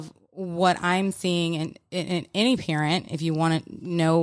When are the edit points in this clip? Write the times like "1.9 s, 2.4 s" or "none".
none